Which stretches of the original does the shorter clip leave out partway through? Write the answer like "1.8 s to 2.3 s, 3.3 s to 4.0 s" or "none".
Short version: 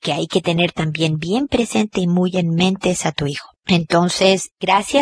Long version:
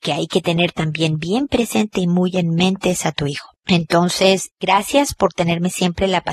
none